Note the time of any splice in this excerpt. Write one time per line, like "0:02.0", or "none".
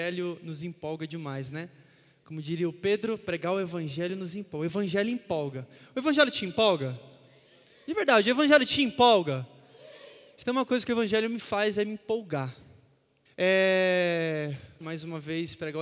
0:13.3
0:14.8